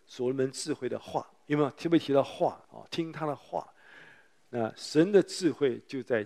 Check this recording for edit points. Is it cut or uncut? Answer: cut